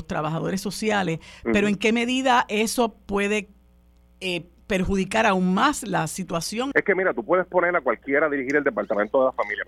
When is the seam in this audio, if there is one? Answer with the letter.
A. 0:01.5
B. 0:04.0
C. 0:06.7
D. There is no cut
C